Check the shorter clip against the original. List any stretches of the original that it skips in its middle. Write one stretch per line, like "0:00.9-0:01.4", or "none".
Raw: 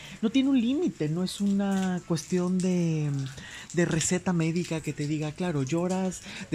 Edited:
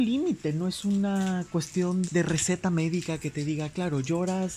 0:02.6-0:03.7